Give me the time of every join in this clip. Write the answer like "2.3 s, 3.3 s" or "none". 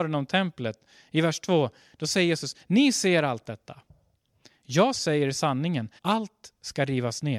6.0 s